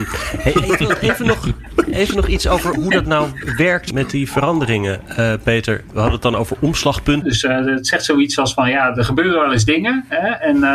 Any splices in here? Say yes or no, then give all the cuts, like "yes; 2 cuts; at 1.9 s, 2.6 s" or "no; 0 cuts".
yes; 1 cut; at 7.2 s